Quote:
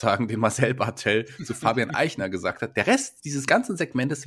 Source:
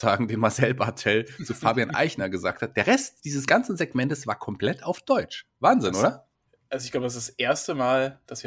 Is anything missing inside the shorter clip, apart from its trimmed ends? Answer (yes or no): no